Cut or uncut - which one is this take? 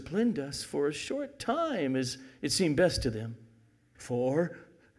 cut